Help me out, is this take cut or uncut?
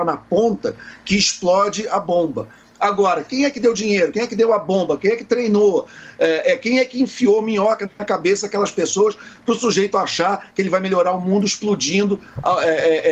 uncut